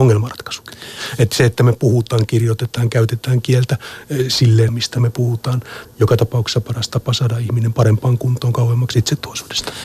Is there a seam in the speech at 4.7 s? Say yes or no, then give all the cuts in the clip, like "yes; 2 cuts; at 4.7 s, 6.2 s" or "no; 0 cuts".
yes; 2 cuts; at 4.7 s, 5.8 s